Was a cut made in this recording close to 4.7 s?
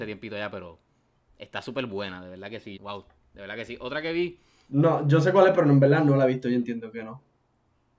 yes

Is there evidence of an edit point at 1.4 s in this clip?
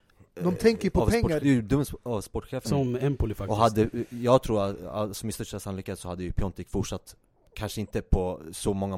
yes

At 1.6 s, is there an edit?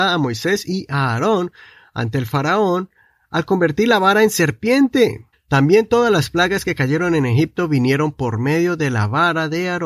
no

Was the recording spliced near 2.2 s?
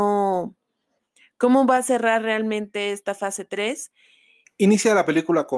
no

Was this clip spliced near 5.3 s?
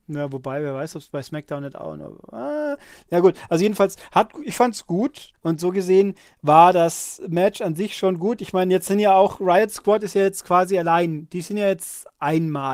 yes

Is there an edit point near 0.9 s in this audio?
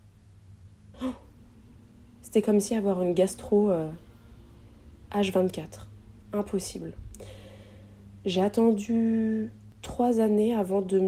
yes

